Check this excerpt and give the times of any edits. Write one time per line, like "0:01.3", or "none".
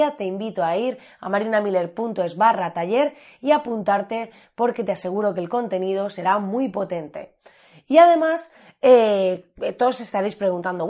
none